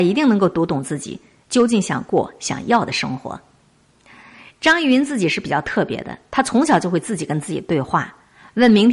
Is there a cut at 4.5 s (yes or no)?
no